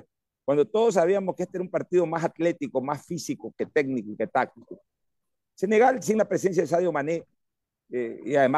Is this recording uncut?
yes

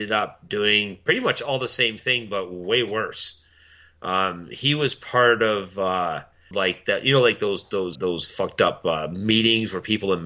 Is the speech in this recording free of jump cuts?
no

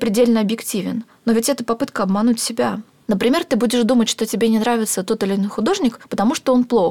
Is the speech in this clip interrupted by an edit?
no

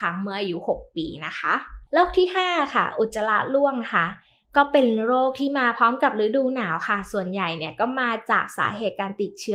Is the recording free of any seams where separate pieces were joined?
no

